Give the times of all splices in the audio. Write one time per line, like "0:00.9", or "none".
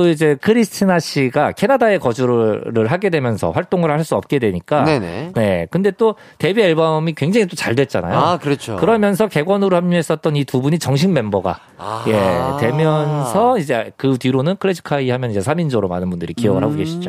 0:05.3